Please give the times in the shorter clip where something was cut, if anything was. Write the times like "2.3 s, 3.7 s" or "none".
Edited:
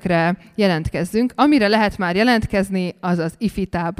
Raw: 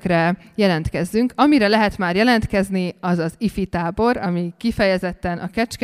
none